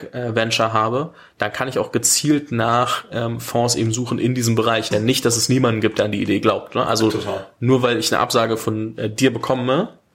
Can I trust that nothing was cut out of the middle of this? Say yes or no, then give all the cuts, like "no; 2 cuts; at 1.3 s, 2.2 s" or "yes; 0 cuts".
no; 1 cut; at 4.9 s